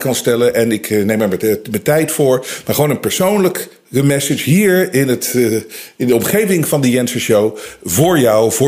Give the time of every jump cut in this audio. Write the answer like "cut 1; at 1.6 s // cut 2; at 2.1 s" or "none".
none